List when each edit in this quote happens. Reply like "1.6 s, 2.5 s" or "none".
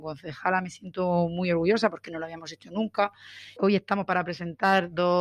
3.6 s